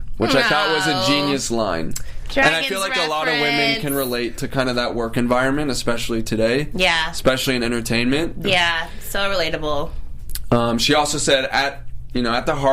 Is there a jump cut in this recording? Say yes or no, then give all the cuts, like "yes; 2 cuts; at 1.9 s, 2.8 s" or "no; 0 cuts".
yes; 1 cut; at 8.4 s